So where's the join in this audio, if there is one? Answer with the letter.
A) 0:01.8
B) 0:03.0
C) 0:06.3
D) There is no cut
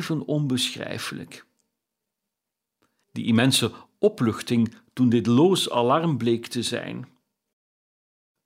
B